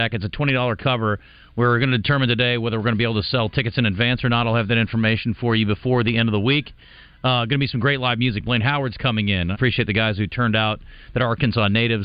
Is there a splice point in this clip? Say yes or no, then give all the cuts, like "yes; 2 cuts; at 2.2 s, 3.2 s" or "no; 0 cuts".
yes; 1 cut; at 9.5 s